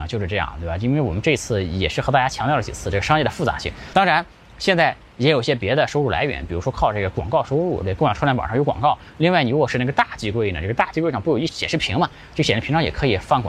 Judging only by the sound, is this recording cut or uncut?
cut